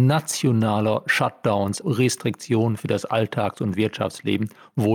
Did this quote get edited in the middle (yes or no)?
yes